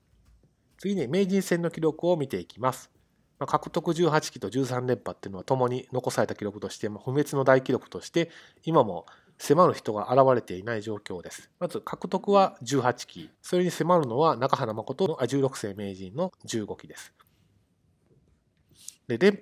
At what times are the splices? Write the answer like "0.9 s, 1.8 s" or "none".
11.5 s, 13.3 s